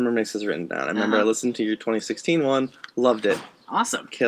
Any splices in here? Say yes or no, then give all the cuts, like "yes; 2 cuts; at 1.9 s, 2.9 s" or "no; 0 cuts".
no; 0 cuts